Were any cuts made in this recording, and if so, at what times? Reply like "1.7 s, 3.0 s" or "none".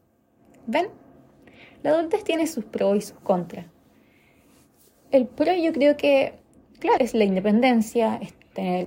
7.0 s